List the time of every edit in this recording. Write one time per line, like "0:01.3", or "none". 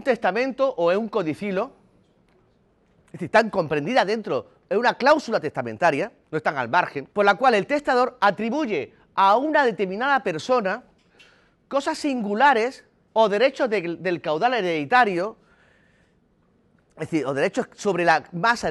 0:07.1
0:13.1

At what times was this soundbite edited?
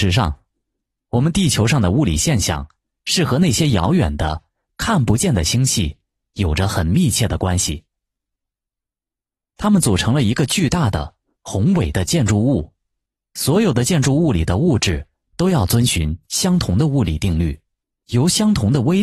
0:09.4

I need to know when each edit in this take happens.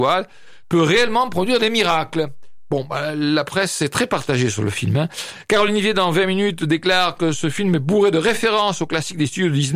none

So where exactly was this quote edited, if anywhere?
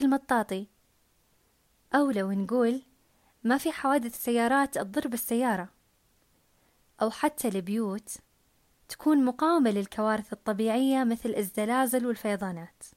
none

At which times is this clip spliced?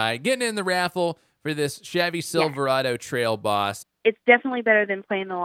0:03.8

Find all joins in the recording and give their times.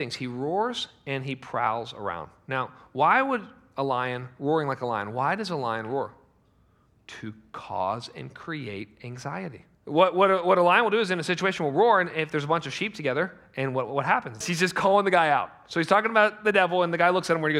0:09.7
0:14.4

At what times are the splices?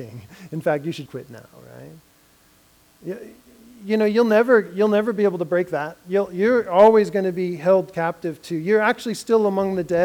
0:01.1

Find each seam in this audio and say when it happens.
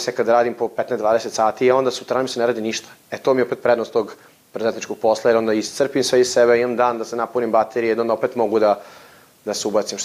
none

